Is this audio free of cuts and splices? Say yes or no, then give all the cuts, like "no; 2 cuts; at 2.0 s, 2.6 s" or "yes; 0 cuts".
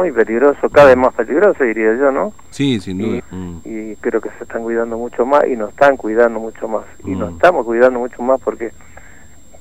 no; 1 cut; at 3.2 s